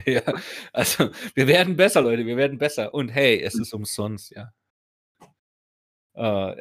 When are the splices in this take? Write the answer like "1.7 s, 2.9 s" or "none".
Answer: none